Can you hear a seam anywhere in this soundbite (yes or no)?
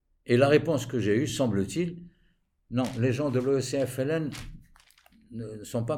no